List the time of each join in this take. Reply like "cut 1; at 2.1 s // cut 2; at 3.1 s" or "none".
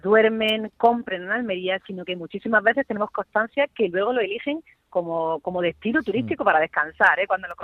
none